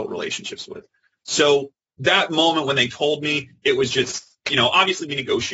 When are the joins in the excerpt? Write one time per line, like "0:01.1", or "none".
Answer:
none